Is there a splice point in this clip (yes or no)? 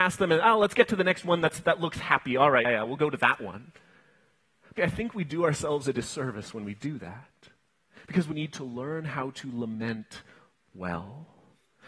yes